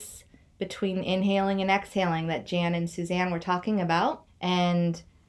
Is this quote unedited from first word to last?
no; 1 cut; at 4.3 s

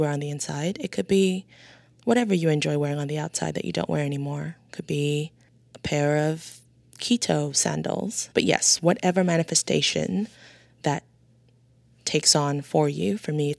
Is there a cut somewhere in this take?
yes; 1 cut; at 8.3 s

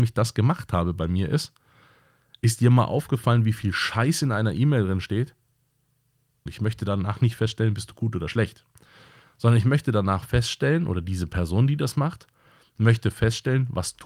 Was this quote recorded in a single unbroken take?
no; 1 cut; at 6.5 s

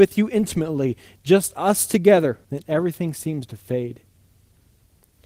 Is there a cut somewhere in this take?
yes; 1 cut; at 2.4 s

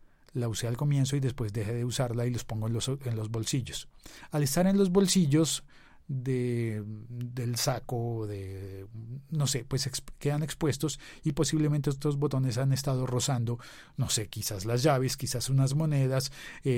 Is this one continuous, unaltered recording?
yes; 0 cuts

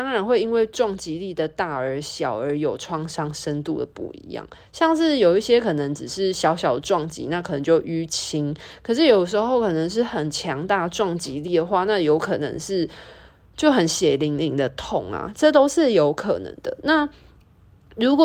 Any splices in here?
no; 0 cuts

